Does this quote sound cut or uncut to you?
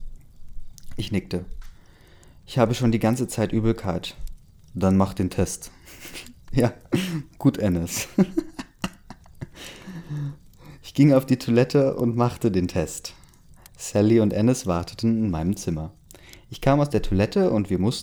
uncut